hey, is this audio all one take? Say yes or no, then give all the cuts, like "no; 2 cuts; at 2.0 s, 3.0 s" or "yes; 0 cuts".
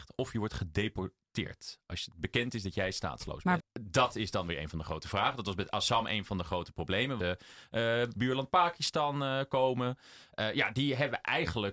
no; 2 cuts; at 3.6 s, 7.2 s